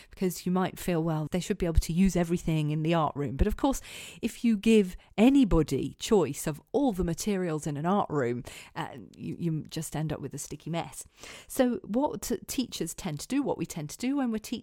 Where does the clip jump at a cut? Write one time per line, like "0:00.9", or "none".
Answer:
0:01.3